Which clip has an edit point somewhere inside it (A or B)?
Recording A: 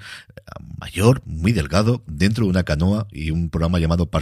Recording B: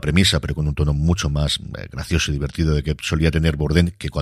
A